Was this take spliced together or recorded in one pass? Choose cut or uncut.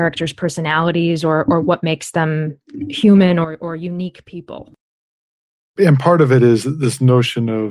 uncut